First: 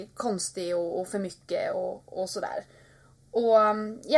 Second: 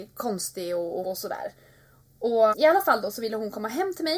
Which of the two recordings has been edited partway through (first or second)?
second